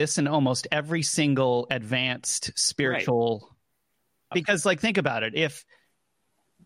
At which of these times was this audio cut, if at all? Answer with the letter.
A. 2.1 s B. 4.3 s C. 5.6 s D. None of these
B